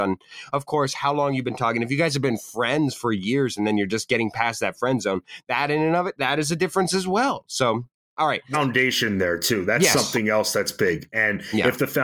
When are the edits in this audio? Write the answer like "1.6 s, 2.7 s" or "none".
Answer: 8.5 s